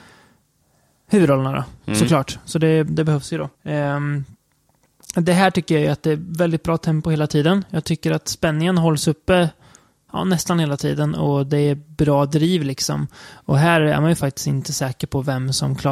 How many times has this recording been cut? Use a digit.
1